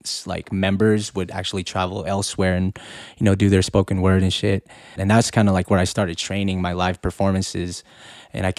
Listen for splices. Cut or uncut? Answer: cut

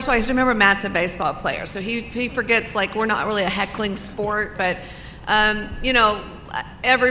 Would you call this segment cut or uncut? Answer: cut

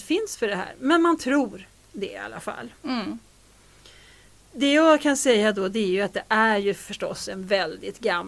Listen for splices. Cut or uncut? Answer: uncut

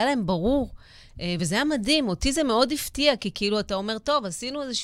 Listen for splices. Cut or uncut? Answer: uncut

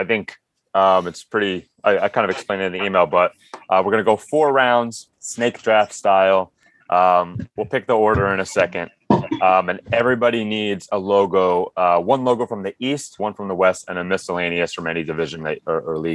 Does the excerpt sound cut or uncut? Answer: cut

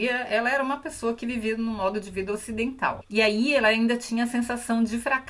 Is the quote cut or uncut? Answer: cut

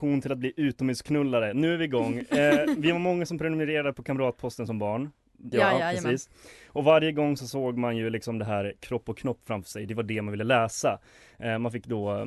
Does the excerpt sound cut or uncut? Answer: cut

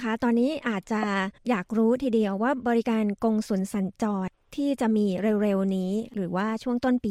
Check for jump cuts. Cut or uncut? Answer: cut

